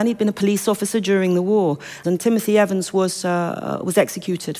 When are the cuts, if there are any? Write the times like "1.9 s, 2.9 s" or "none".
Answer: 2.0 s